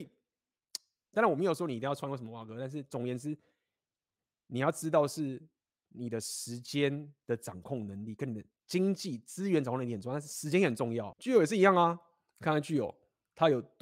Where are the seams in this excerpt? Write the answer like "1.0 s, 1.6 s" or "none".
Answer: 11.1 s